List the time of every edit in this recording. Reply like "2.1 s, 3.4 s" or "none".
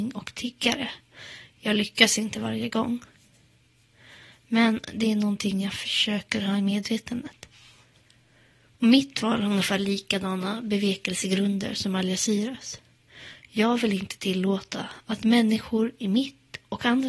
none